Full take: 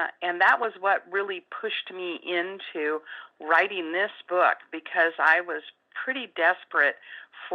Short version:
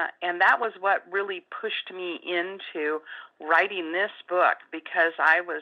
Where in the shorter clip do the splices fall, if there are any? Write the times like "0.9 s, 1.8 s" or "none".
none